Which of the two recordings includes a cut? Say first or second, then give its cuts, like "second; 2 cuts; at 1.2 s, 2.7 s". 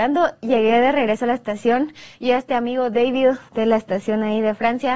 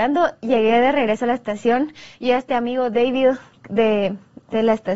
first; 1 cut; at 3.5 s